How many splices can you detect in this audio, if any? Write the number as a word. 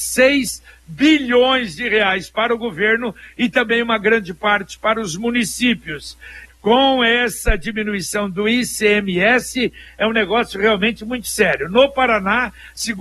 one